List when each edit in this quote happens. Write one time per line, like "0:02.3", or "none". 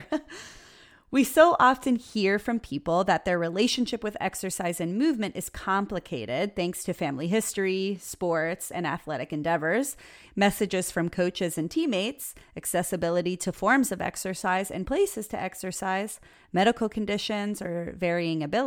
none